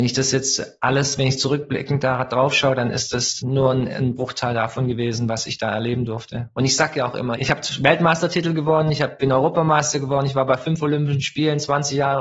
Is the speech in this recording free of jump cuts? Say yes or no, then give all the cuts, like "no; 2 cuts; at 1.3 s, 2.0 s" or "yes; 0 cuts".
yes; 0 cuts